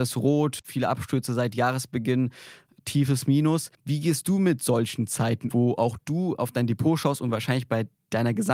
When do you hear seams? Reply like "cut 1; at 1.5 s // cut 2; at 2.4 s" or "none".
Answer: cut 1; at 3.7 s // cut 2; at 5.5 s